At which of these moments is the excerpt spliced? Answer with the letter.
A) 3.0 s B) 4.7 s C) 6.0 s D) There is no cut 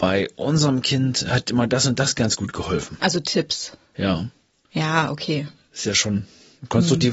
D